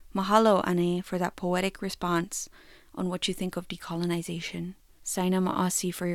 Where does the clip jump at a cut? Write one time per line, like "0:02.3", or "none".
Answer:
0:05.0